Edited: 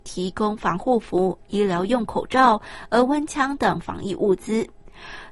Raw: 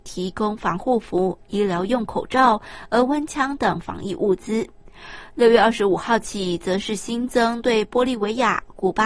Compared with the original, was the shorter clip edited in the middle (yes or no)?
no